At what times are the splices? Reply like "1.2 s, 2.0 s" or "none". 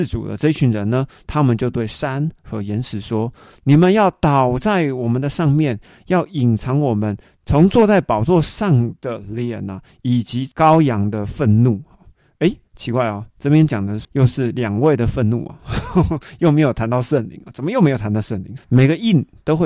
18.6 s